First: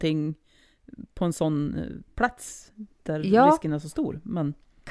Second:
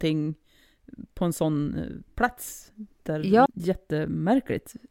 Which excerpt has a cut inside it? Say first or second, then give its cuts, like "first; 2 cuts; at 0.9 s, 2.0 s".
second; 1 cut; at 3.5 s